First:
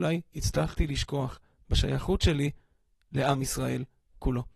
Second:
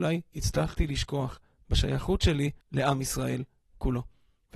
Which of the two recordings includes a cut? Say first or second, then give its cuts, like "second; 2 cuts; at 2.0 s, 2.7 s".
second; 1 cut; at 2.6 s